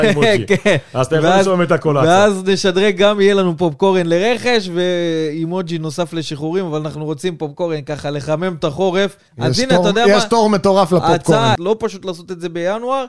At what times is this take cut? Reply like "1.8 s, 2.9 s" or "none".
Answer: 9.3 s, 11.6 s